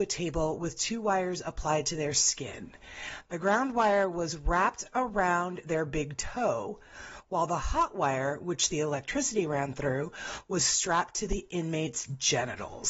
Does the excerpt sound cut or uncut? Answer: uncut